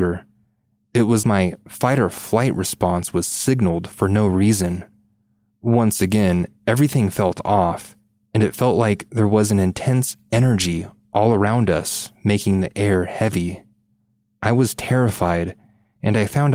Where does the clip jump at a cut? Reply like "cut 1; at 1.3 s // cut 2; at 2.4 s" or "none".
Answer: cut 1; at 1.2 s